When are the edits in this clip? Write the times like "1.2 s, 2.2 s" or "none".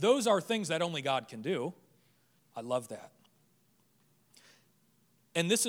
2.4 s